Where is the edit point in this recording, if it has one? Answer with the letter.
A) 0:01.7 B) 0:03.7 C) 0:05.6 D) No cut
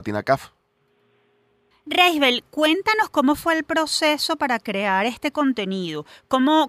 A